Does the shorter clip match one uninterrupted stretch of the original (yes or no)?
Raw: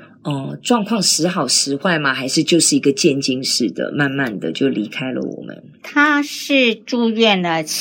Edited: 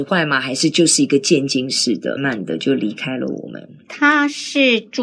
no